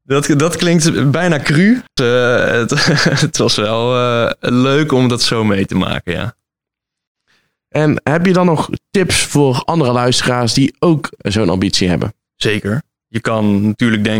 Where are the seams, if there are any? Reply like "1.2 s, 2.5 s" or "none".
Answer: 2.0 s